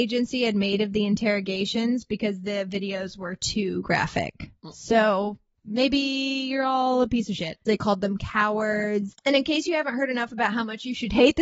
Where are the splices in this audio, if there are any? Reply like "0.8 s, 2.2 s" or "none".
7.7 s, 9.1 s